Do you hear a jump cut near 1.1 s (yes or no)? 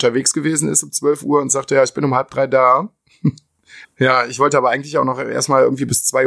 no